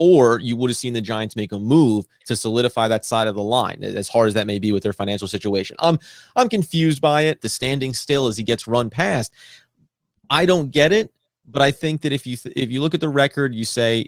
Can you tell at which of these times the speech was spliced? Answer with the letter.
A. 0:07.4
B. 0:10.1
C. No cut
A